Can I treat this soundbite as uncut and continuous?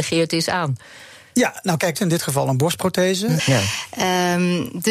no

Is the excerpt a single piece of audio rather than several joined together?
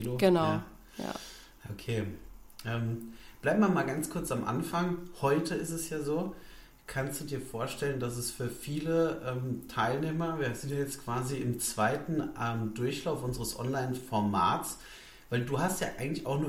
yes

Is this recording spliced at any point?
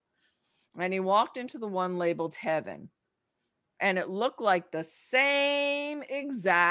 no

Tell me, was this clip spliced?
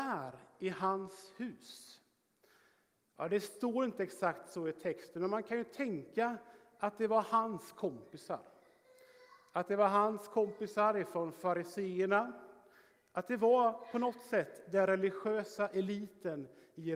no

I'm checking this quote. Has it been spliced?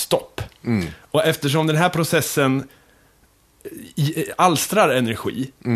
no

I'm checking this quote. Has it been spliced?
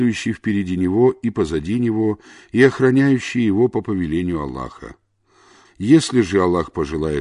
yes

